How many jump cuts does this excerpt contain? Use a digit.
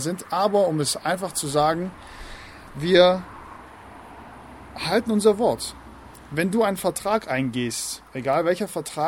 1